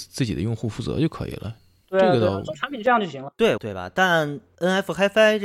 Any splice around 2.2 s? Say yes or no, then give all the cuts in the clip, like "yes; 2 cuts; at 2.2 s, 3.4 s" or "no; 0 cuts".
no; 1 cut; at 3.6 s